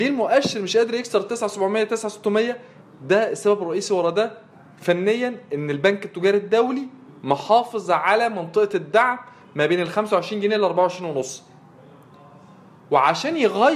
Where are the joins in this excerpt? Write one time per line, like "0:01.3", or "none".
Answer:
none